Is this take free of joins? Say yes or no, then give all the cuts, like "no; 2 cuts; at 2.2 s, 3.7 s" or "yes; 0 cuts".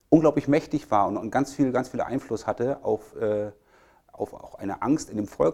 yes; 0 cuts